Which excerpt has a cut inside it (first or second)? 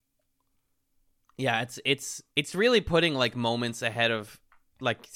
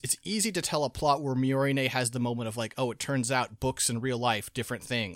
first